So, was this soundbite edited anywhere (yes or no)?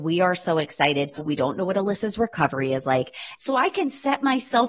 yes